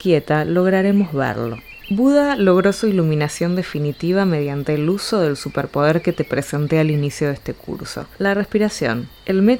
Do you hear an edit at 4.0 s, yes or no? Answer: no